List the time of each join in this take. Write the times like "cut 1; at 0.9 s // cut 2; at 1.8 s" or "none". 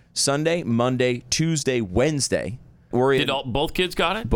cut 1; at 2.9 s